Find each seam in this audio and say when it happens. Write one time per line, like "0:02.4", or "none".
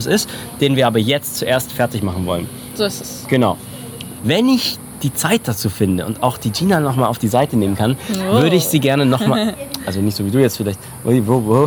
0:04.1

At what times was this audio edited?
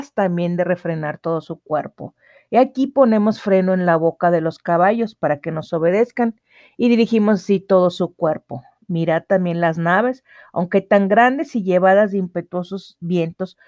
none

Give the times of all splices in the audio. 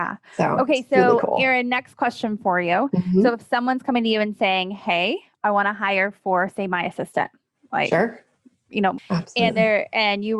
0:09.0

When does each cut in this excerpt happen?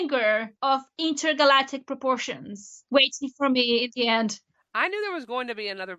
none

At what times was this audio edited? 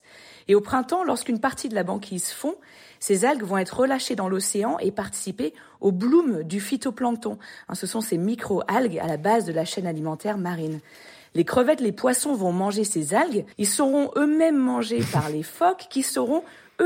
0:13.5

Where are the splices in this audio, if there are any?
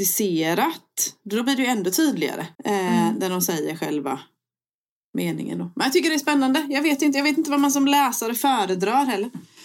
0:02.5

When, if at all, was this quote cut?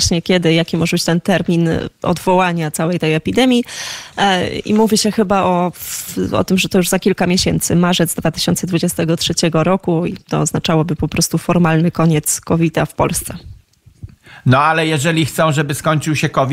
none

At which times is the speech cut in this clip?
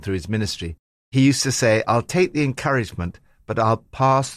none

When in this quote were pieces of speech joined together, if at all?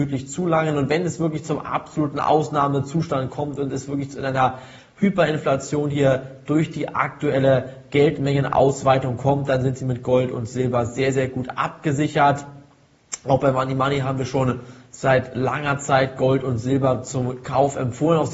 none

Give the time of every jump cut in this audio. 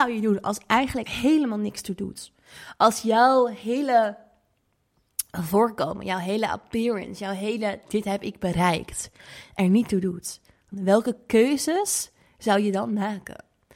0:01.1
0:10.7

